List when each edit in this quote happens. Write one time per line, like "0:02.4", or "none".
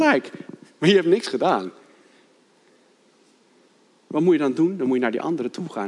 none